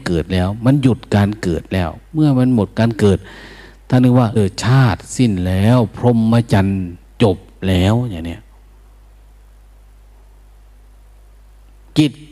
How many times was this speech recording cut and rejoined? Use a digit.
1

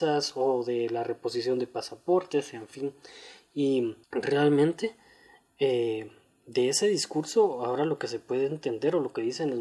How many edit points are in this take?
1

